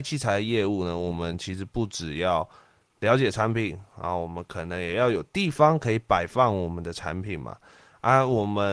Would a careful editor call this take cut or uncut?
uncut